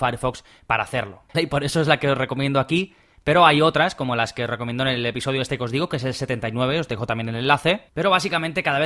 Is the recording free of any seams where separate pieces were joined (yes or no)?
no